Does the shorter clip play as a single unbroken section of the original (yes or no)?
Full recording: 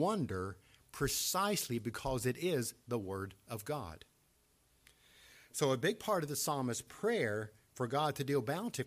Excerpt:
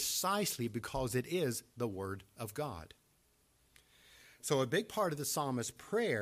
yes